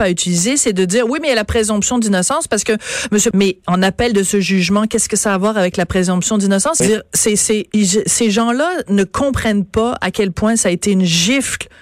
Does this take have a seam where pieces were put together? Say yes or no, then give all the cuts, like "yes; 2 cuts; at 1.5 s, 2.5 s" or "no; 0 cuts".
yes; 2 cuts; at 3.3 s, 6.8 s